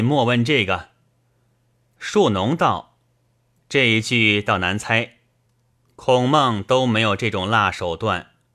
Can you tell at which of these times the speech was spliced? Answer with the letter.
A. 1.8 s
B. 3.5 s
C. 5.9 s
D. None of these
D